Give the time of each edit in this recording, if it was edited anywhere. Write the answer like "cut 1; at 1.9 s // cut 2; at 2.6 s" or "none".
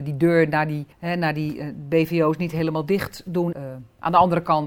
cut 1; at 0.9 s // cut 2; at 3.5 s